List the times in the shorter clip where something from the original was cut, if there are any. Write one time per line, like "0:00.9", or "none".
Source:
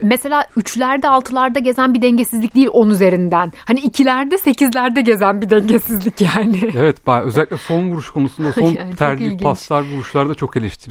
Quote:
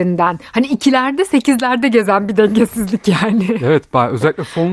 none